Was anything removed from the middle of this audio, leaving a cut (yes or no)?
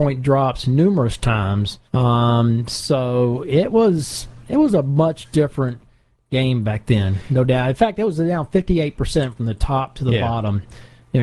yes